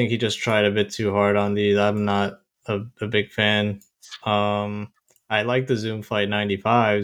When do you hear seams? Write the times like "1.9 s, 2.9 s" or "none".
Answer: none